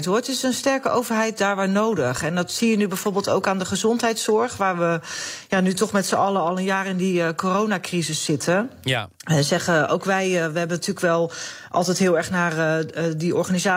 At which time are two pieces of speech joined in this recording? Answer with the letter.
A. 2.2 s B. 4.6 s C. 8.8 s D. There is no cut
D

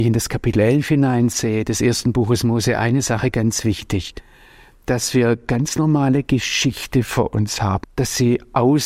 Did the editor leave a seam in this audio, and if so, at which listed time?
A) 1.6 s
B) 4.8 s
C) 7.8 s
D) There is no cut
C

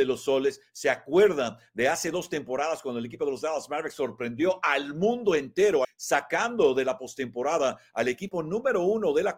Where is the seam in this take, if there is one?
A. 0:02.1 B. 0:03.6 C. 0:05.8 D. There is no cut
C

